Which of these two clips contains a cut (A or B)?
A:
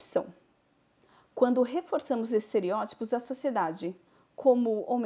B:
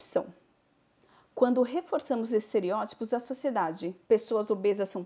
B